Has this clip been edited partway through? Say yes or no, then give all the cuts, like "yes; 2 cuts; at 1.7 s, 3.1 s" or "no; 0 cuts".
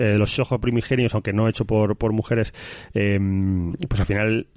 no; 0 cuts